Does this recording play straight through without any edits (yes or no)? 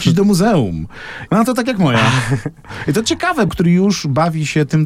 no